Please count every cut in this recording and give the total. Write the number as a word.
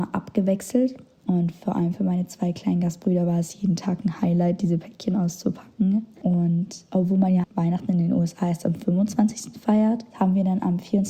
three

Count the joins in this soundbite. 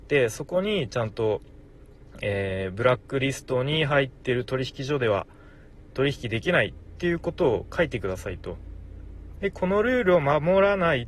one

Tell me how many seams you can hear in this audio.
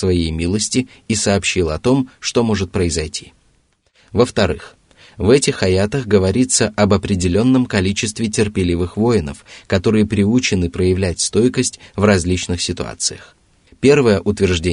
one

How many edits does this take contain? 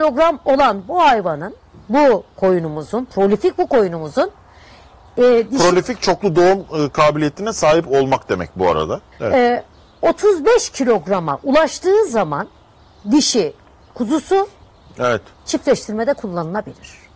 one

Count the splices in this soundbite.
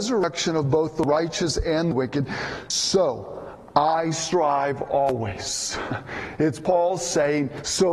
zero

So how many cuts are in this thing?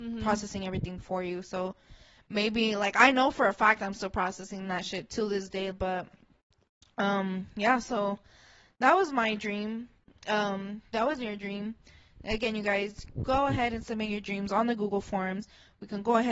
one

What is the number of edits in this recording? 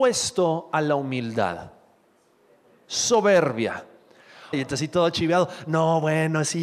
one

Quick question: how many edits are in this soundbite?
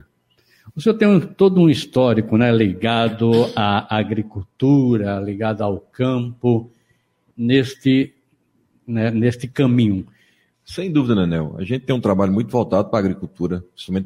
two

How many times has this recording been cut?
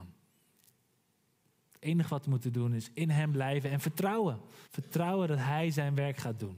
one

